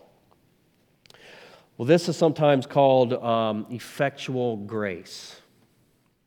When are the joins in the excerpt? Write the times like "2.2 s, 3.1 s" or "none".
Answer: none